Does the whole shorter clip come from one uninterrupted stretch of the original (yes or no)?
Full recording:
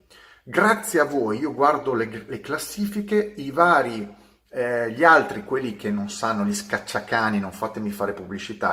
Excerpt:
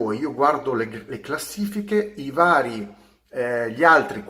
yes